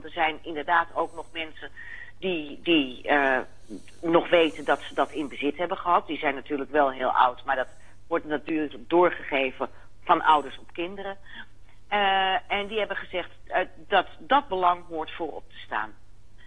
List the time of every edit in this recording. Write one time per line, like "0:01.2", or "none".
none